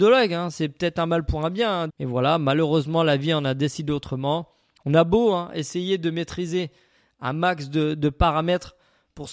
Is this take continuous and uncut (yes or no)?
no